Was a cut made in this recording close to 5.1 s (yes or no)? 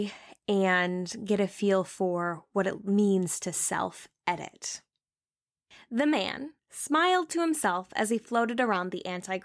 no